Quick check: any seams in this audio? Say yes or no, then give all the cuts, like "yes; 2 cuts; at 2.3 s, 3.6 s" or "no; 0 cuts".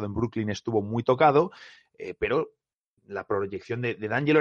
no; 0 cuts